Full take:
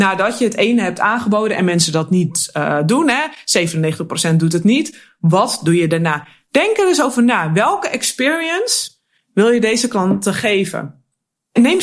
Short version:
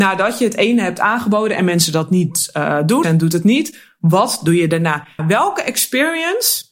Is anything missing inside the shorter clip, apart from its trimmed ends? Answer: yes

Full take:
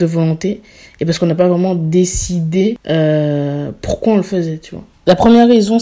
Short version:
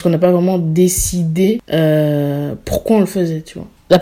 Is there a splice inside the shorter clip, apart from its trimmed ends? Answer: no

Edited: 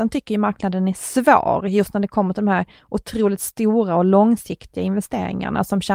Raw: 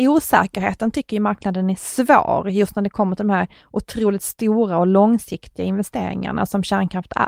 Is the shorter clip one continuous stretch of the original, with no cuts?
yes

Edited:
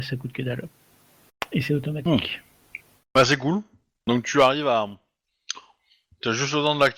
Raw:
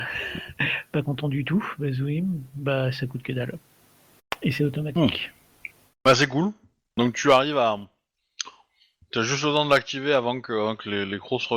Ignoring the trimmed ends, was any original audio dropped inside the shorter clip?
no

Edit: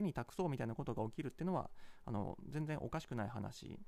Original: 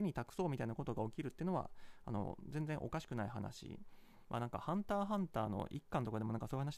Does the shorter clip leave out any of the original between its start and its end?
no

